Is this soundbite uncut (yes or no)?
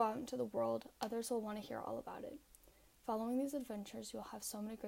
yes